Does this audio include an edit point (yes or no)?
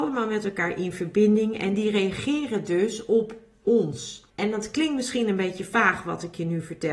yes